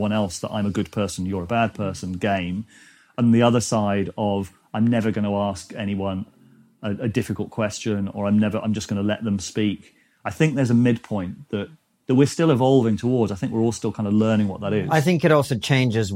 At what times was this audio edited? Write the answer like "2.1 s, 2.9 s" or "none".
none